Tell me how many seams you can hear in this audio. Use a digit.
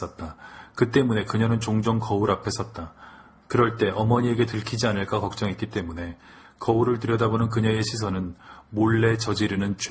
0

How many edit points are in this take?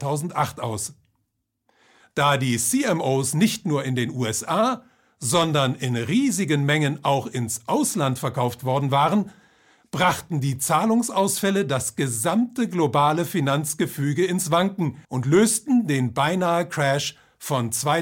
2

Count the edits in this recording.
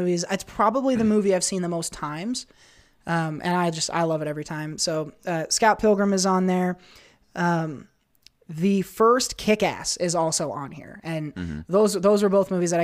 0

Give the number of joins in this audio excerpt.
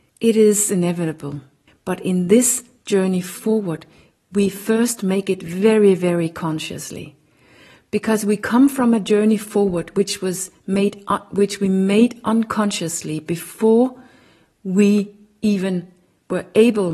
1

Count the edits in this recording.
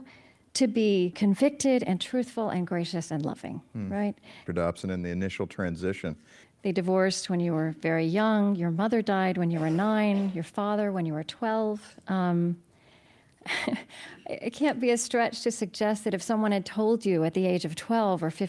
2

